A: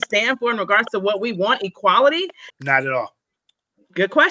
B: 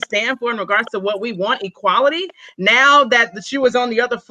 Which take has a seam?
A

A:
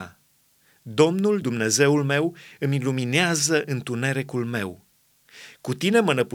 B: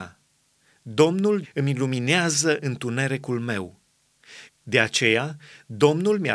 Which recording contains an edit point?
B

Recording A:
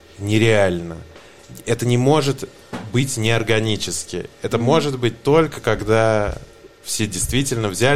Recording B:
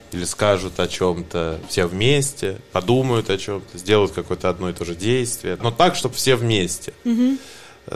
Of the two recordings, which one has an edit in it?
B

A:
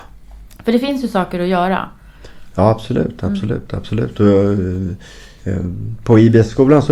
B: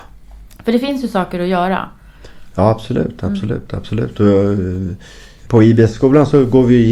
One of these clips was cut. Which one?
B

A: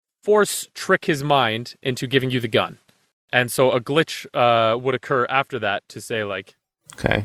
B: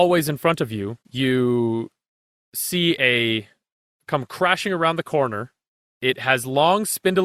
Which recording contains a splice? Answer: B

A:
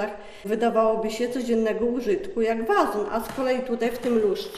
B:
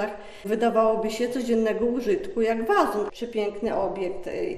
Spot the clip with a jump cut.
B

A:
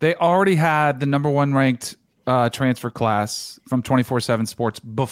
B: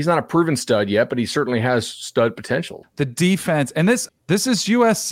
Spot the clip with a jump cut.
B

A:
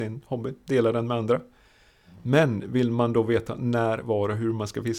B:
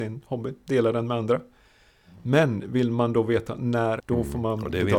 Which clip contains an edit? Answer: B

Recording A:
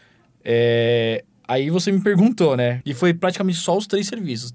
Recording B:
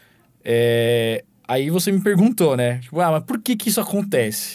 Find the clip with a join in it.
A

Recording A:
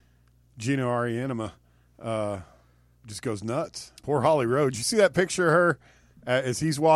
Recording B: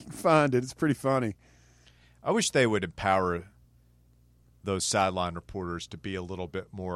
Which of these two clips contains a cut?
A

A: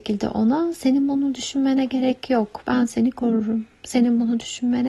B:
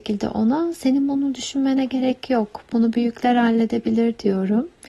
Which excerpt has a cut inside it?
A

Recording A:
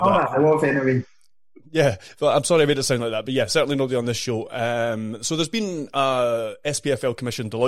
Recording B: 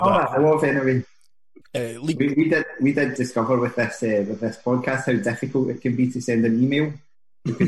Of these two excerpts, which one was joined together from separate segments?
B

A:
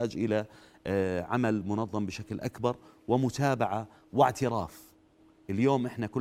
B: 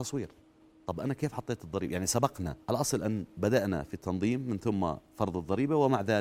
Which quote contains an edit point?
B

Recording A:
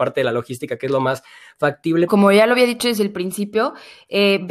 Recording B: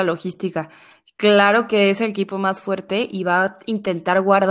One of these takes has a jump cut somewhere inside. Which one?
A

